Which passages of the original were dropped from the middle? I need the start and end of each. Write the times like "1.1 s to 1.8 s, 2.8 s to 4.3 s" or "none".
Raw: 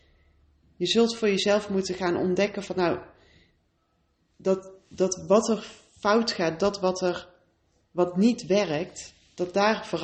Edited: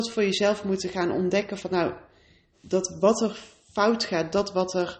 3.6 s to 4.8 s